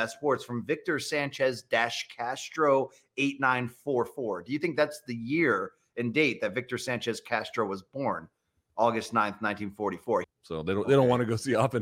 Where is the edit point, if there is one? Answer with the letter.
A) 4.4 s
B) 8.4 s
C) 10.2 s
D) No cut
C